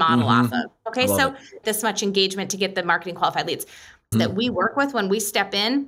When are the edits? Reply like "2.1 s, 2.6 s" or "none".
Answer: 1.6 s, 4.1 s